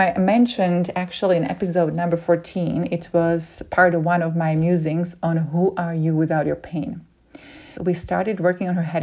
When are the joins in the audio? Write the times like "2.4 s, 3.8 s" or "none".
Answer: 7.7 s